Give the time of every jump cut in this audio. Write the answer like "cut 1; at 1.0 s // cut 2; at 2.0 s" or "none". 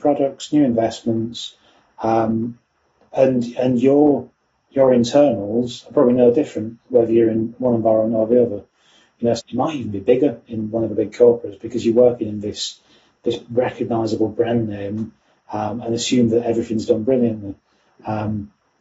cut 1; at 1.9 s // cut 2; at 9.4 s